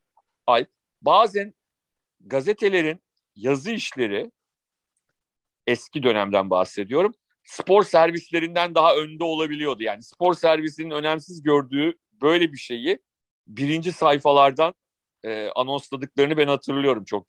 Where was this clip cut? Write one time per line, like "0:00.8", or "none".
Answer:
none